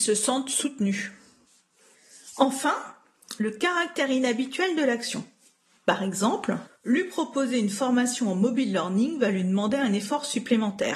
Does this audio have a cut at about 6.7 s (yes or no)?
yes